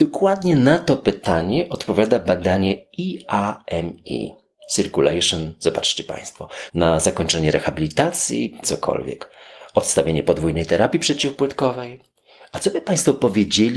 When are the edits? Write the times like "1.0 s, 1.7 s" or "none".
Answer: 6.7 s, 8.6 s